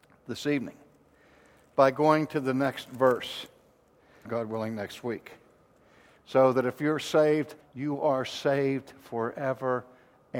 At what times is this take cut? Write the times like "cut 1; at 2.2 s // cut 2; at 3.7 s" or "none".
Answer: cut 1; at 4.3 s // cut 2; at 6.2 s // cut 3; at 7.6 s